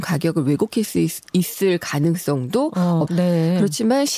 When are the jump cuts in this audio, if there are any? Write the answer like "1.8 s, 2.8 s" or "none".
3.1 s